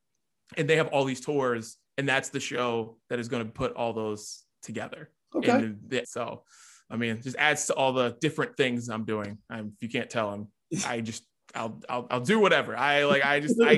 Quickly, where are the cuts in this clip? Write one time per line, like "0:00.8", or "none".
0:06.0